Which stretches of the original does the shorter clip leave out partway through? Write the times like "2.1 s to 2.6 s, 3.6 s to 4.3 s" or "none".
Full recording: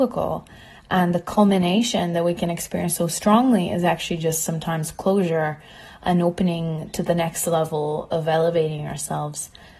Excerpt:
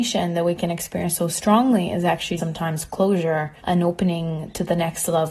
4.2 s to 4.4 s, 5.6 s to 6.0 s